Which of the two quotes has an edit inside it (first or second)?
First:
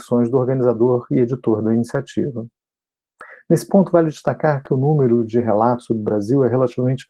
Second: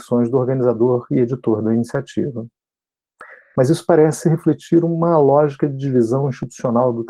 second